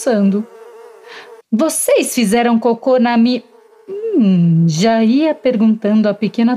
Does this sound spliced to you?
yes; 1 cut; at 1.4 s

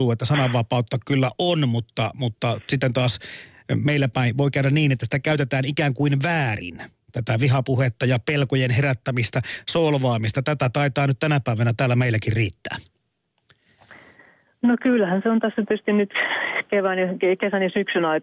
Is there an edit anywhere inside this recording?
no; 0 cuts

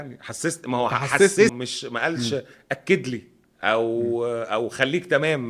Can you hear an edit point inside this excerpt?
yes; 1 cut; at 1.5 s

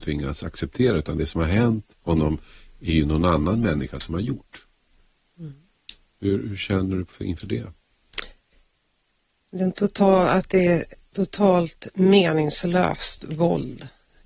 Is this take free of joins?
yes; 0 cuts

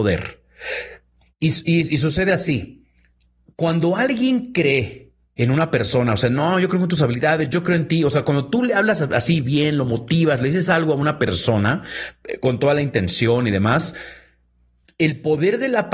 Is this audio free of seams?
yes; 0 cuts

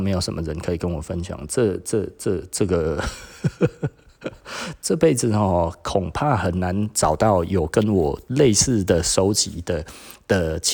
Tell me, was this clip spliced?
no; 0 cuts

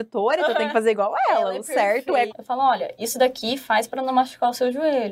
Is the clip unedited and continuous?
no; 1 cut; at 2.3 s

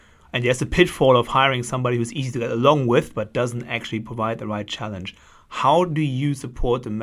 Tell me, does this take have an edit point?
no; 0 cuts

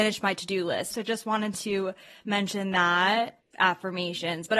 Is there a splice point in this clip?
yes; 2 cuts; at 0.9 s, 3.4 s

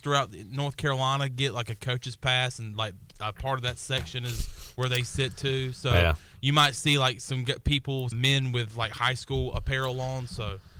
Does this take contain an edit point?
yes; 1 cut; at 8.1 s

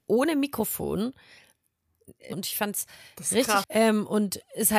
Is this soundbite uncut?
no; 2 cuts; at 2.3 s, 3.6 s

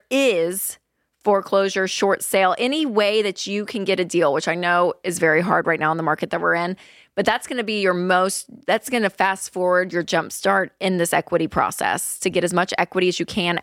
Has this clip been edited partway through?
no; 0 cuts

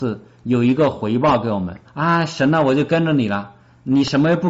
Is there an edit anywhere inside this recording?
yes; 1 cut; at 1.8 s

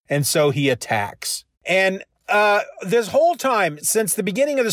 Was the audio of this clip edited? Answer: yes; 2 cuts; at 1.5 s, 3.8 s

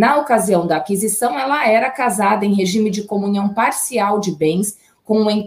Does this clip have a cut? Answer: no; 0 cuts

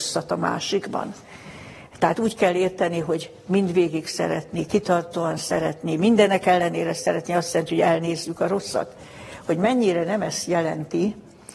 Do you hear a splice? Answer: no; 0 cuts

